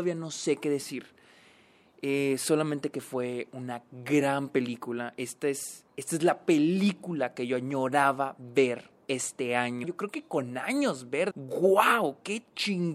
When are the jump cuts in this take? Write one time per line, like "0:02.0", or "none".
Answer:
0:05.9
0:09.8
0:11.3